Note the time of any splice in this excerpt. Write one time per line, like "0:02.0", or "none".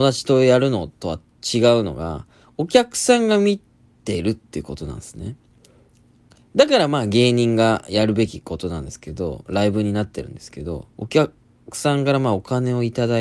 0:10.9